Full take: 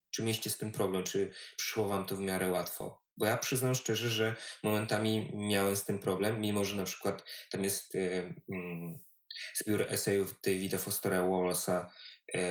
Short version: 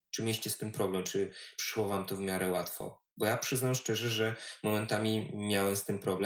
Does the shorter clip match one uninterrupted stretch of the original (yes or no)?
yes